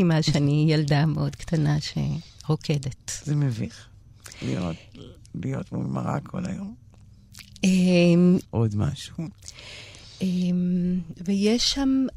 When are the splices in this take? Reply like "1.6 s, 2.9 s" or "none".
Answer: 8.4 s